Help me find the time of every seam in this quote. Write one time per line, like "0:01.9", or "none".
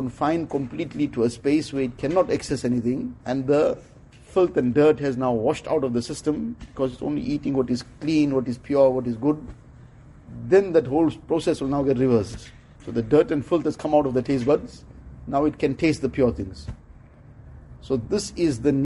0:03.2
0:12.8

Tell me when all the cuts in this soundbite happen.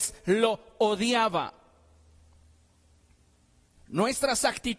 0:03.8

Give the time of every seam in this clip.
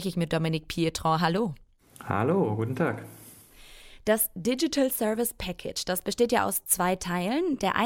none

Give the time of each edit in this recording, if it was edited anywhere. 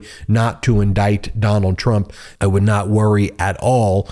0:02.3

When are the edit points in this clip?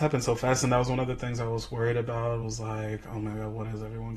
none

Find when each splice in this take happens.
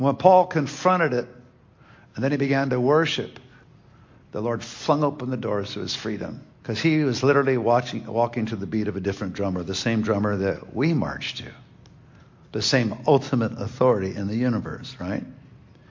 0:04.2
0:06.5

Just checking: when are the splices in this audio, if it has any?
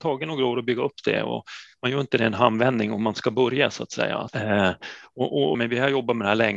0:04.3
0:05.5

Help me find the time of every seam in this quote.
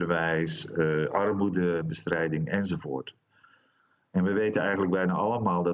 none

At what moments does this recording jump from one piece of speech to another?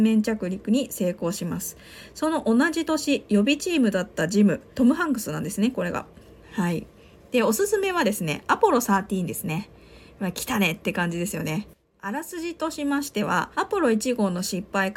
0:04.7
0:06.4
0:13.5

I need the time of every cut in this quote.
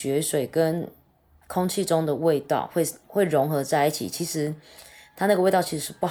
none

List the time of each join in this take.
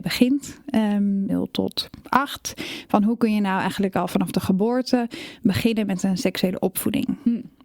0:01.3

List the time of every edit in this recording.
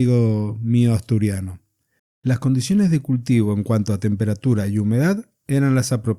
0:02.0

